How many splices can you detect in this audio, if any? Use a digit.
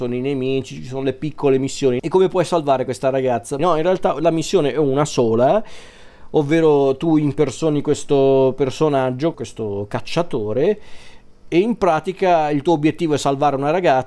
3